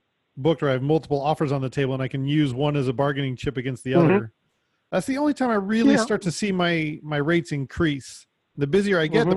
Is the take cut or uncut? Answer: uncut